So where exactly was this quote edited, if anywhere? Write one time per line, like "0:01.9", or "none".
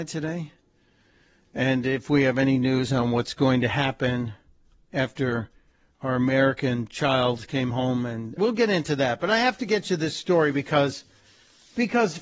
0:08.4